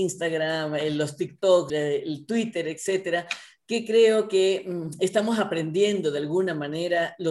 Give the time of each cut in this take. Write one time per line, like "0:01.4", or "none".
0:01.7